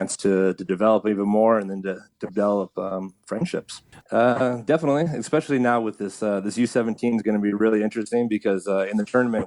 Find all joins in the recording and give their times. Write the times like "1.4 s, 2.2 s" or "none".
4.0 s